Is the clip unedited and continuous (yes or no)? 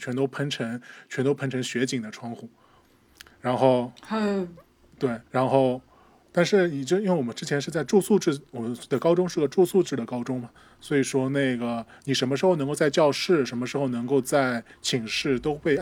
no